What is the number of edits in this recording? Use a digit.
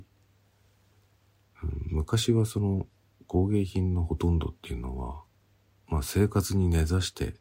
0